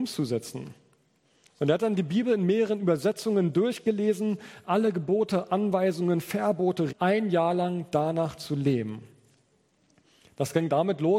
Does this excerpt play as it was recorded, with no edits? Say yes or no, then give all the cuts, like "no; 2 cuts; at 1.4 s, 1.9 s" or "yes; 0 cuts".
no; 1 cut; at 6.9 s